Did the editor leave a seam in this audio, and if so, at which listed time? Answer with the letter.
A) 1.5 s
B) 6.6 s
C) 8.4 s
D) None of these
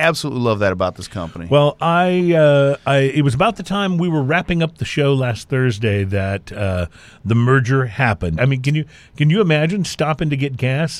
C